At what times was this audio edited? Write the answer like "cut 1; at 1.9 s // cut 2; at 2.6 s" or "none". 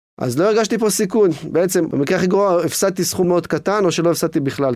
cut 1; at 3.2 s